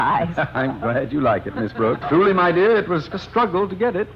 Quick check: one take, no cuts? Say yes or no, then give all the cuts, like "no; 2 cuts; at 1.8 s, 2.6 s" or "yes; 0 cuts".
no; 2 cuts; at 2.0 s, 3.1 s